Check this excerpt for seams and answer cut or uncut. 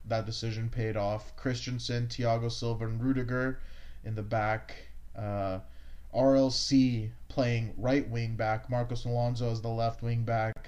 uncut